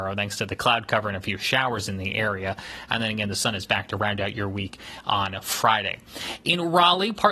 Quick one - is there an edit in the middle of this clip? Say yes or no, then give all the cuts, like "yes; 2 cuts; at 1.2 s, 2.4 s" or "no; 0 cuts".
no; 0 cuts